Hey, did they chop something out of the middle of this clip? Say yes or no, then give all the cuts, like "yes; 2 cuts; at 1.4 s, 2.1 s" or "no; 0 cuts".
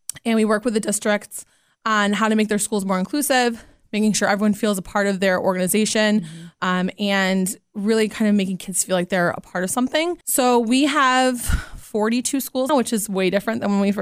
yes; 2 cuts; at 10.2 s, 12.7 s